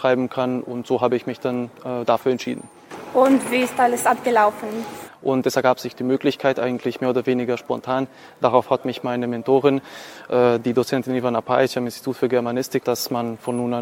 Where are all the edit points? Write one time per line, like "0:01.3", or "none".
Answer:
0:05.1
0:12.8

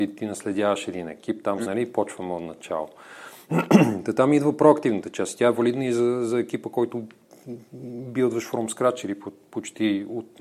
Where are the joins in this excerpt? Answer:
0:01.6

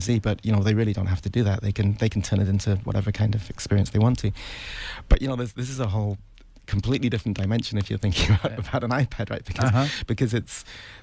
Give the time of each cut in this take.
none

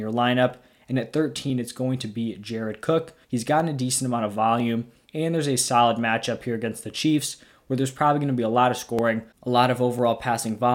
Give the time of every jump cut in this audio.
0:03.2
0:05.0

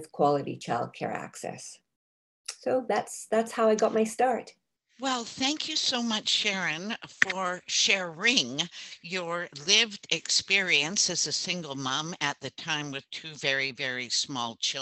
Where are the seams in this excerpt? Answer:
none

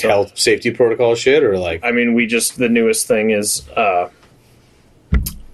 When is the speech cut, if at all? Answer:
0:01.8

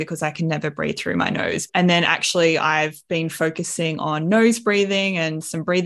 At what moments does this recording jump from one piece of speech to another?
0:01.7

